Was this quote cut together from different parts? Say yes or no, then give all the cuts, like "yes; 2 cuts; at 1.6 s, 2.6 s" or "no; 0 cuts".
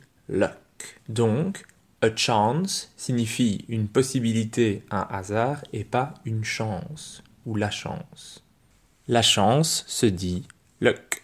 yes; 1 cut; at 1.0 s